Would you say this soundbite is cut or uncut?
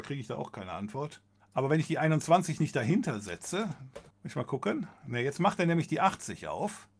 cut